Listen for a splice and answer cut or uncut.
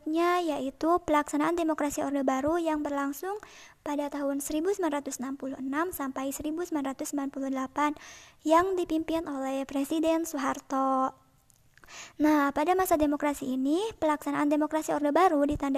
uncut